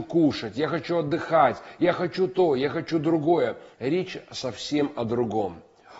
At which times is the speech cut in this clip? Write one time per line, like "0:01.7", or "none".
0:03.7